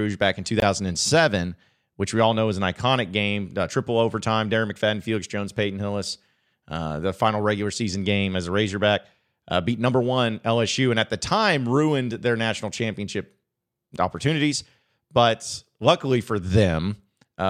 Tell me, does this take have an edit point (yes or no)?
no